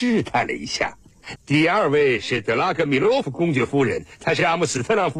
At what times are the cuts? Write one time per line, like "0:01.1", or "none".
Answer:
0:01.4

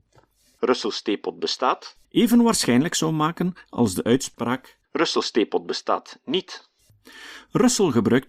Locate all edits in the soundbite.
0:02.0
0:04.8

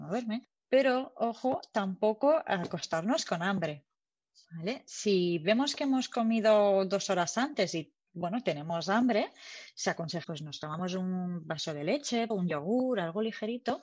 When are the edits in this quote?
0:10.2
0:12.3

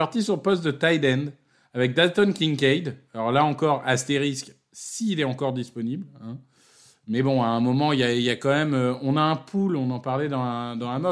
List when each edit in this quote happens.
none

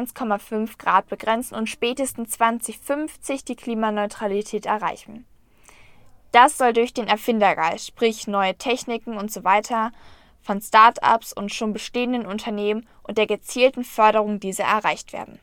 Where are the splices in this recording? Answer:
none

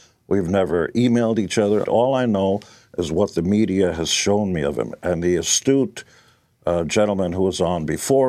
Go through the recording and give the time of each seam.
0:01.8

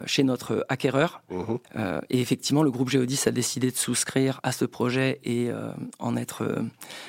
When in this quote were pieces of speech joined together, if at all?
0:01.6
0:04.4

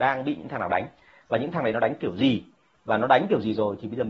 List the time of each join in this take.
none

